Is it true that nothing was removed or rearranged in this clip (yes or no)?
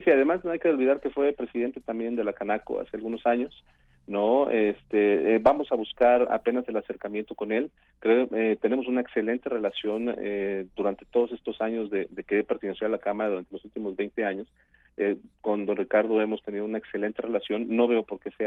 yes